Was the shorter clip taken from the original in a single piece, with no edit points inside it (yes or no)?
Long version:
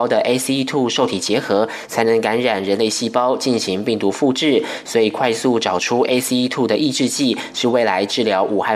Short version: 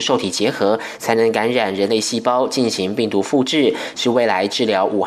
no